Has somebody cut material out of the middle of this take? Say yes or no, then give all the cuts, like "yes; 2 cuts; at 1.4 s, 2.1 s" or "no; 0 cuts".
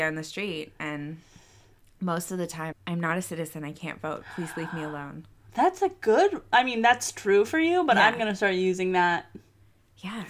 yes; 1 cut; at 2.7 s